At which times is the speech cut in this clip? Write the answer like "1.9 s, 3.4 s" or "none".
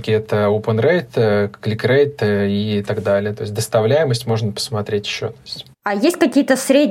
none